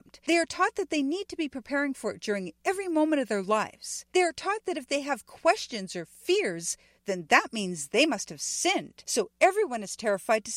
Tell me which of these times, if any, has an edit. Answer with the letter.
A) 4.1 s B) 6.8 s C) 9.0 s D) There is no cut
D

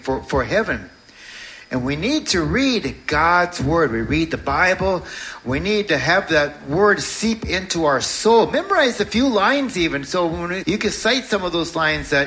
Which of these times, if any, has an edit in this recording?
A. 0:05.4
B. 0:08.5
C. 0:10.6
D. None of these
C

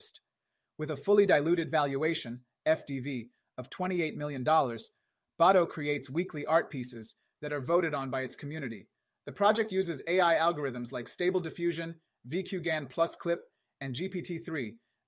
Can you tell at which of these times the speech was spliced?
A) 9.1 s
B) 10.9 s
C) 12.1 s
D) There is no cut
D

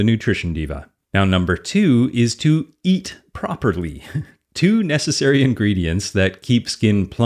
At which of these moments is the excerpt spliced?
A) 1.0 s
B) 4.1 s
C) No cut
A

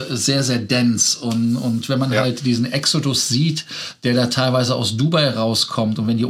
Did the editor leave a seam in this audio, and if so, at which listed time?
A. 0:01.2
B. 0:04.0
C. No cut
C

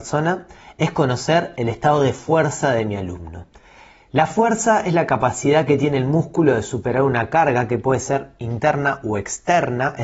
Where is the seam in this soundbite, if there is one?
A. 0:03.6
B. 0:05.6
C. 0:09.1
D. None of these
D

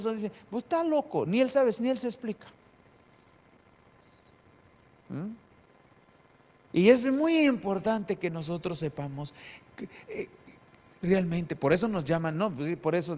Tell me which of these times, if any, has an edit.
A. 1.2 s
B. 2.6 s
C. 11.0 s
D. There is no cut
D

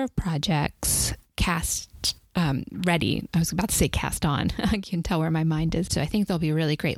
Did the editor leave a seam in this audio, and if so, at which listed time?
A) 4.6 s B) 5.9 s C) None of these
B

